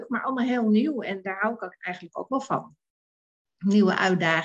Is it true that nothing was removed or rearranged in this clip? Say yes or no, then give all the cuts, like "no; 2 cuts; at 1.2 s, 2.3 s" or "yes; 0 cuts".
yes; 0 cuts